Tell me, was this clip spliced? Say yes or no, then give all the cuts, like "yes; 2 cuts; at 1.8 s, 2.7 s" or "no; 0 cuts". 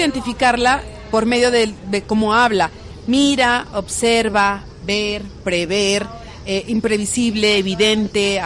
no; 0 cuts